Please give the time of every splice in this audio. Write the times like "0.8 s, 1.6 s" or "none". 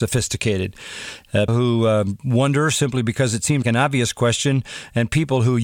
1.5 s, 3.6 s